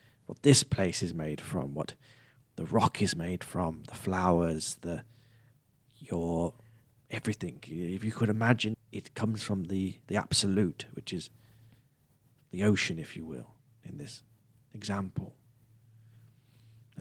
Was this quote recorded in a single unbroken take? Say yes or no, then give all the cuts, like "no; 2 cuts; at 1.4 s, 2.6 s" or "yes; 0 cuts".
no; 1 cut; at 8.7 s